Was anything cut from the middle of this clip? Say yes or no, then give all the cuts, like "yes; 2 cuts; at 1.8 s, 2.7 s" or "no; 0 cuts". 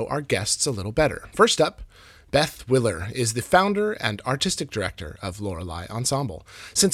no; 0 cuts